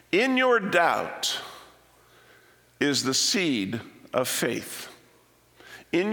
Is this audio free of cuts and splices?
yes; 0 cuts

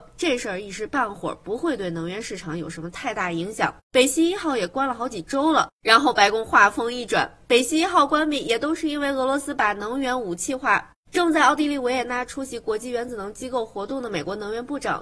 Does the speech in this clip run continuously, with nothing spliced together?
no; 1 cut; at 3.8 s

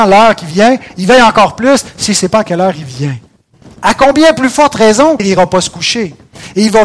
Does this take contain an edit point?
yes; 2 cuts; at 3.8 s, 5.2 s

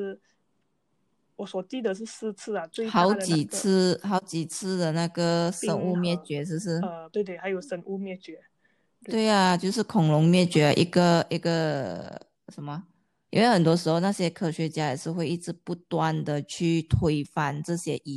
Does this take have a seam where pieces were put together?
yes; 2 cuts; at 7.1 s, 13.3 s

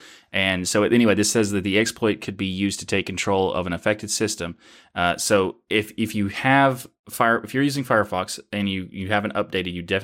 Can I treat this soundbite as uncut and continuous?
yes; 0 cuts

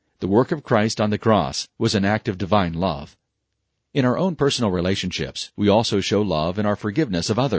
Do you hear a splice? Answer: yes; 1 cut; at 1.7 s

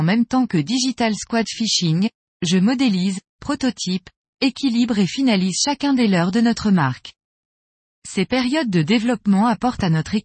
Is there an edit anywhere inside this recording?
yes; 1 cut; at 8.0 s

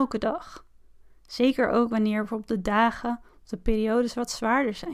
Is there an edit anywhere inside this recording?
no; 0 cuts

